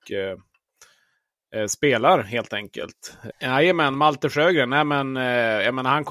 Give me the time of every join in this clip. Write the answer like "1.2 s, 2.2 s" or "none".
3.3 s